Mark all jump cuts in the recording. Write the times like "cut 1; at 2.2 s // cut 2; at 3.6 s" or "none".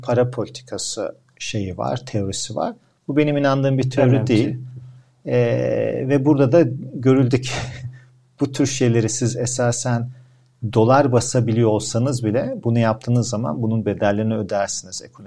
none